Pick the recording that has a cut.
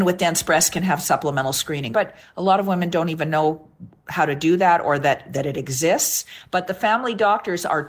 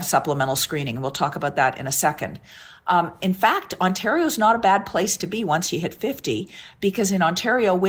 first; 1 cut; at 1.9 s

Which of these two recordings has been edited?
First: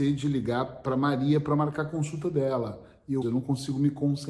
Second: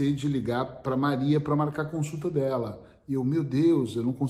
first; 1 cut; at 3.2 s

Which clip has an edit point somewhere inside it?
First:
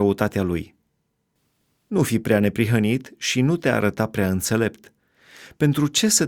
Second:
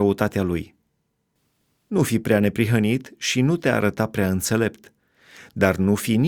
second; 1 cut; at 5.4 s

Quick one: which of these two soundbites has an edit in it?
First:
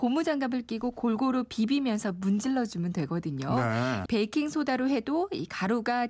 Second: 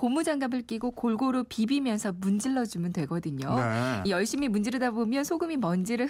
first; 1 cut; at 4.1 s

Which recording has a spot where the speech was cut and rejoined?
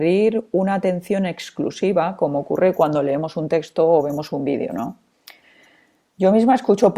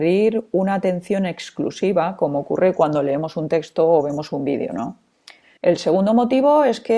second; 1 cut; at 5.6 s

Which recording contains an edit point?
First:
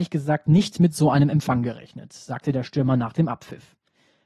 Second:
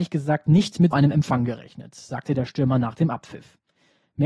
second; 1 cut; at 0.9 s

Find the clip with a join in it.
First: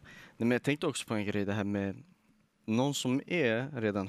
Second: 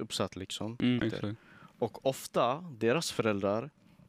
second; 1 cut; at 1.0 s

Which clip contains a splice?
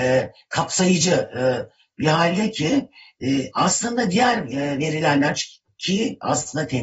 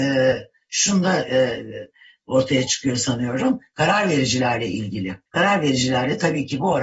second; 1 cut; at 5.3 s

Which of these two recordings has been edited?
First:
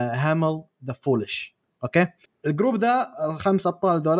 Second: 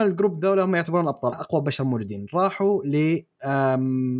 second; 1 cut; at 1.3 s

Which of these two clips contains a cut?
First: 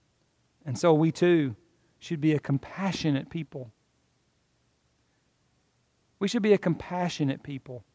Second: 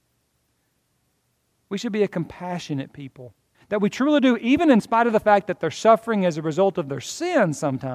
second; 1 cut; at 3.5 s

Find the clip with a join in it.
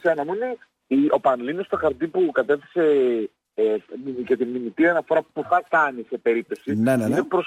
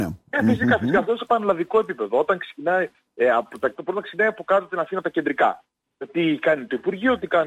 second; 1 cut; at 3.8 s

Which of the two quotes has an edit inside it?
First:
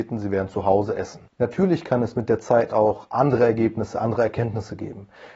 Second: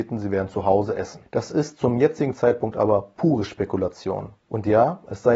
second; 1 cut; at 1.2 s

